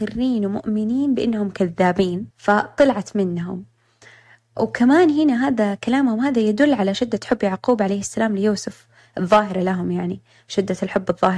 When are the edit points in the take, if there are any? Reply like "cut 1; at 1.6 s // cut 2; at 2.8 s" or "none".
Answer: cut 1; at 2.3 s